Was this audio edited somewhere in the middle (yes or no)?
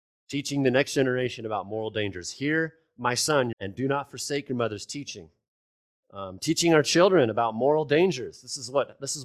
yes